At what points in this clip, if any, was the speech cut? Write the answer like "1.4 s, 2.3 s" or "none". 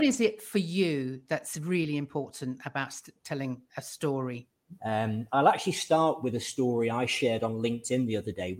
4.8 s